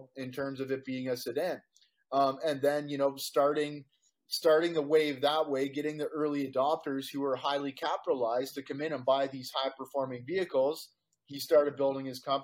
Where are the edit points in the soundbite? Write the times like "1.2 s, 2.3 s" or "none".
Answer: none